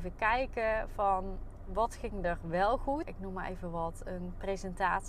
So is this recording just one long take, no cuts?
no; 1 cut; at 3.0 s

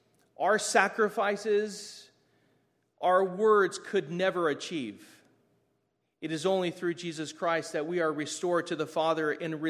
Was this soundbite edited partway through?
no; 0 cuts

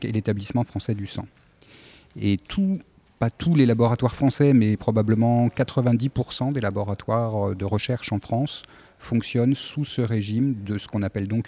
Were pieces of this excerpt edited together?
no; 0 cuts

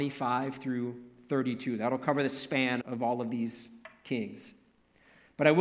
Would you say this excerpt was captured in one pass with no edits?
no; 1 cut; at 2.8 s

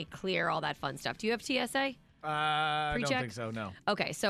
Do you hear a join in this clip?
no; 0 cuts

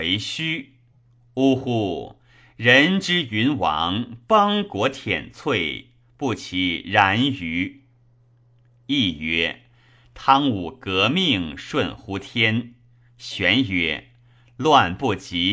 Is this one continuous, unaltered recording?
yes; 0 cuts

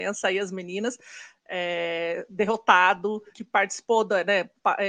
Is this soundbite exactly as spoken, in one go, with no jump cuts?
no; 2 cuts; at 1.3 s, 3.3 s

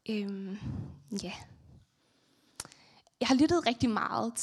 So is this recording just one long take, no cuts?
yes; 0 cuts

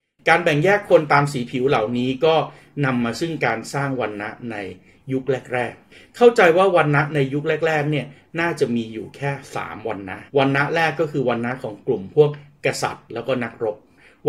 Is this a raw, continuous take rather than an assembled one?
no; 1 cut; at 10.3 s

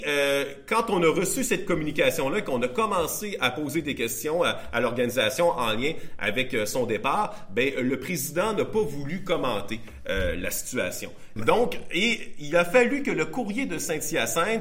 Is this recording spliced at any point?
yes; 1 cut; at 11.4 s

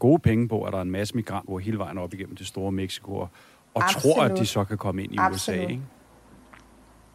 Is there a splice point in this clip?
yes; 1 cut; at 1.5 s

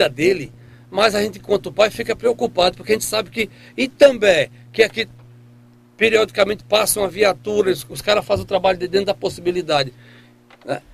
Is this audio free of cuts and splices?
yes; 0 cuts

